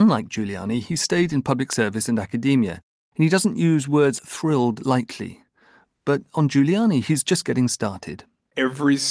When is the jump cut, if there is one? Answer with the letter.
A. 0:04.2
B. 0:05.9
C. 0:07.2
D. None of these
A